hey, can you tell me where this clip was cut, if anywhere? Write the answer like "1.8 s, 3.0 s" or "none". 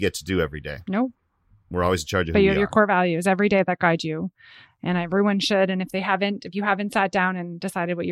none